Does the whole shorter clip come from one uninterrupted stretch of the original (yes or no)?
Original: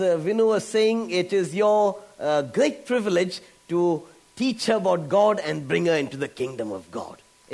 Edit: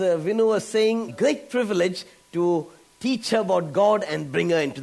no